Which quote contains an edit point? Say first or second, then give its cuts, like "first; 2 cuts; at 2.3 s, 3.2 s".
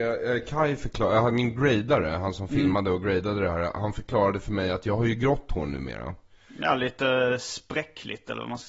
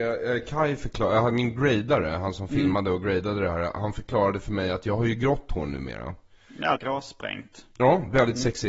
second; 1 cut; at 6.8 s